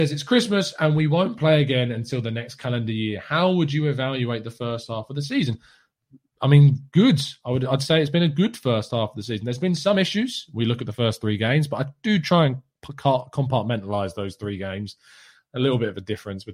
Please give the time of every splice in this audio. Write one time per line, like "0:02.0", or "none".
none